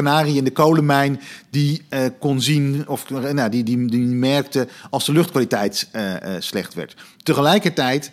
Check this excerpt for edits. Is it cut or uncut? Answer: uncut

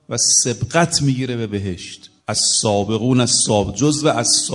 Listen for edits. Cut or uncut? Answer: cut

